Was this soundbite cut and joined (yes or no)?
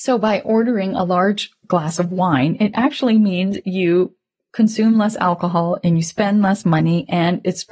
no